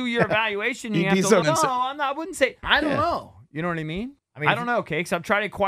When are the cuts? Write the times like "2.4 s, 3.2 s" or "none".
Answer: 1.4 s, 2.6 s, 4.2 s